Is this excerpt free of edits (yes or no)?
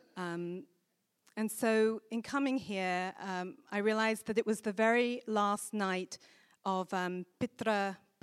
yes